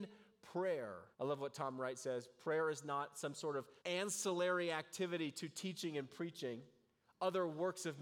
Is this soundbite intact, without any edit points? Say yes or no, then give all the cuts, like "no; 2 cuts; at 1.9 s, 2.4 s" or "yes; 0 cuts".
no; 2 cuts; at 1.1 s, 3.8 s